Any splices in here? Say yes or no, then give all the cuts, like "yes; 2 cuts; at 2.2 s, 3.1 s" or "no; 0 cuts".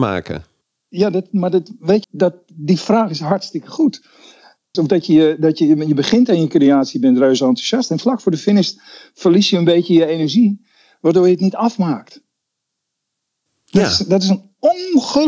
yes; 2 cuts; at 2.0 s, 4.7 s